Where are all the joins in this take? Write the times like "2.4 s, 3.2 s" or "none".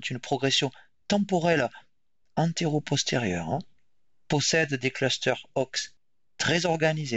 none